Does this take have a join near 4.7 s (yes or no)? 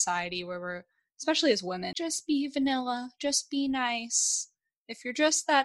no